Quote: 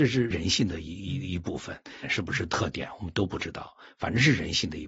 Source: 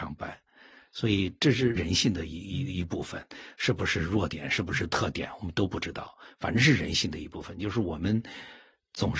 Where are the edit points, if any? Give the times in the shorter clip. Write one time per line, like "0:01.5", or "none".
0:02.0